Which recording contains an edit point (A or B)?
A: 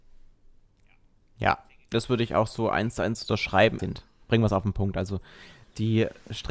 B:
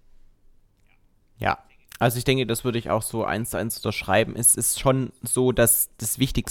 A